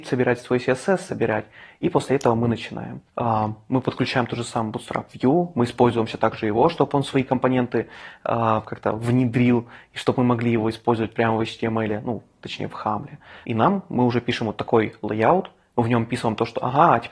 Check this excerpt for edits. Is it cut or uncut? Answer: cut